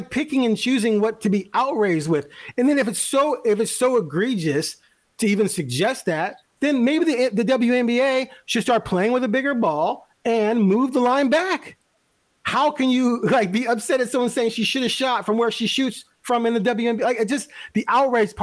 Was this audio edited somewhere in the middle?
no; 0 cuts

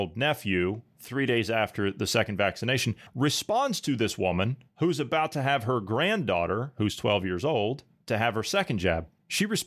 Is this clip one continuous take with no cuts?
yes; 0 cuts

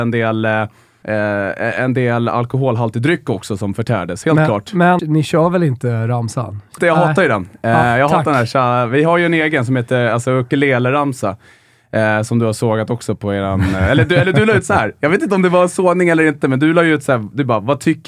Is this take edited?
yes; 2 cuts; at 5.0 s, 6.8 s

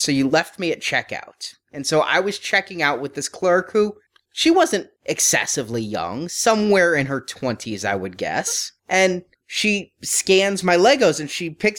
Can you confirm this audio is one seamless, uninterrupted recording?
yes; 0 cuts

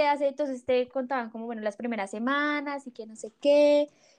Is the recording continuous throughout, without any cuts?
yes; 0 cuts

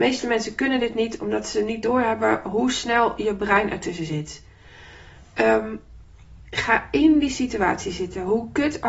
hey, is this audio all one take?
yes; 0 cuts

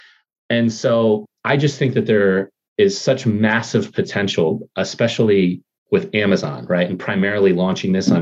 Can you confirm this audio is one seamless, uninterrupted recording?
yes; 0 cuts

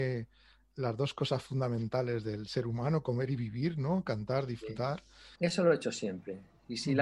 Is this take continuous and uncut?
no; 1 cut; at 5.4 s

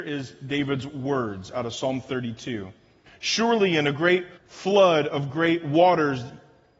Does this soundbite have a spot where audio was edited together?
yes; 2 cuts; at 3.1 s, 4.4 s

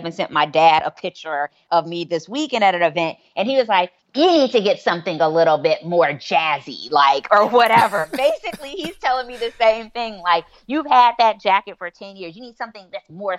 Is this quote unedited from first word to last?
no; 1 cut; at 4.0 s

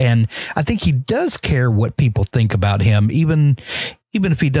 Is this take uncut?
yes; 0 cuts

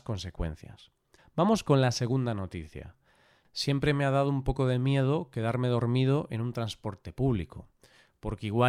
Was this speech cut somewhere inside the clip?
yes; 1 cut; at 1.2 s

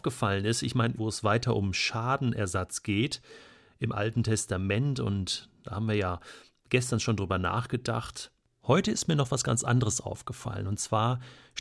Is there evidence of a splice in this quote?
yes; 1 cut; at 1.0 s

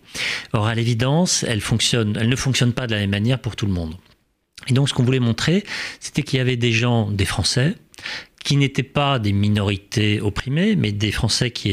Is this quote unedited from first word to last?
yes; 0 cuts

